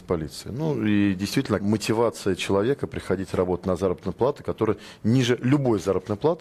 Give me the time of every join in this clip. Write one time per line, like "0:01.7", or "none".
0:01.6